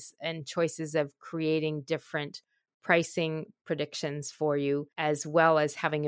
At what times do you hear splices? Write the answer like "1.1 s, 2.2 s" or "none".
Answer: 4.9 s